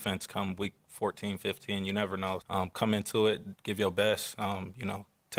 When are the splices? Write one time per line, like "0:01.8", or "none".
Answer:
0:02.4